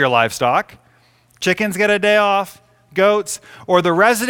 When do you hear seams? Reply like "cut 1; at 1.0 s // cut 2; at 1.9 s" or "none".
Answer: none